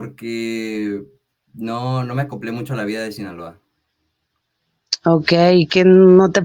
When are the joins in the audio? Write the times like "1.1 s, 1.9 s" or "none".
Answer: none